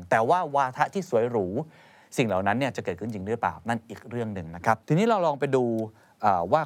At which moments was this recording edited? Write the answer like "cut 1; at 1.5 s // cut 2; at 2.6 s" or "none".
cut 1; at 4.8 s